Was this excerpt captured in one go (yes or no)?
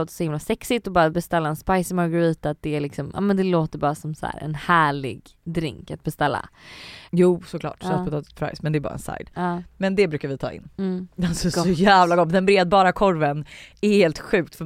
no